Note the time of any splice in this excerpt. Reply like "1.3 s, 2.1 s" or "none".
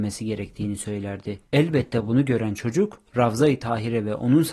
1.4 s